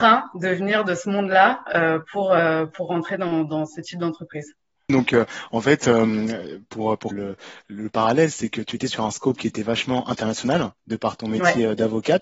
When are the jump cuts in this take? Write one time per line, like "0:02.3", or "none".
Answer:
0:04.9
0:07.1

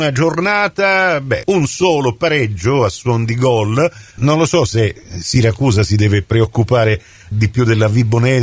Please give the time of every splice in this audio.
0:01.4
0:04.2
0:07.3

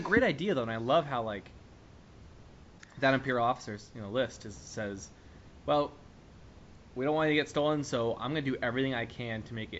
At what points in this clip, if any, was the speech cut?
none

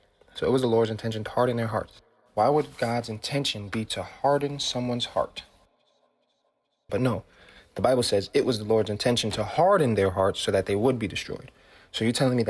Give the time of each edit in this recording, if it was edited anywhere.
0:06.9

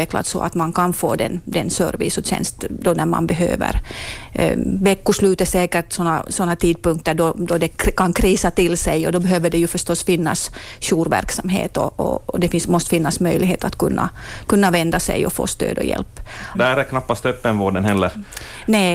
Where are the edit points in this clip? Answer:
0:16.5

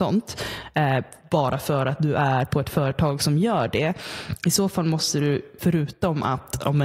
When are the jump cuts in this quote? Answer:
0:05.6

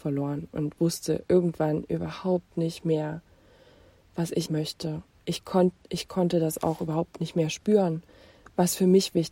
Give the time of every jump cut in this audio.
0:04.5

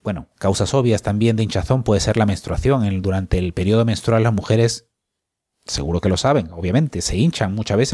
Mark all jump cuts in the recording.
none

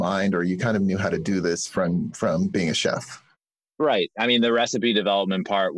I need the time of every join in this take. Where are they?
none

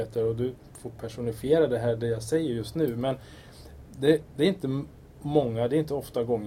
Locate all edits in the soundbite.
none

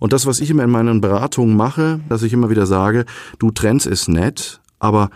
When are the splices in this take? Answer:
0:02.1

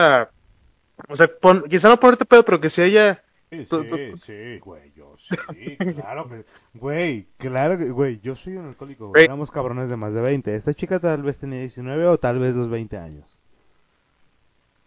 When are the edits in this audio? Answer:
0:03.5
0:04.6
0:09.2

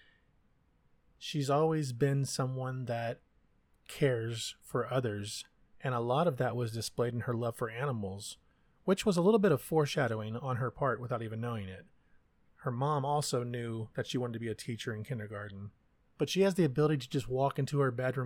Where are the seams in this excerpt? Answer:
0:12.5
0:16.1

